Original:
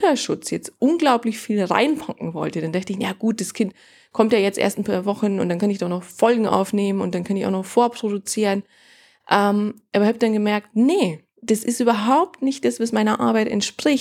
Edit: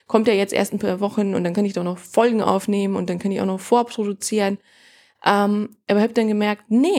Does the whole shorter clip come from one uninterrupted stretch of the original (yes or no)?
yes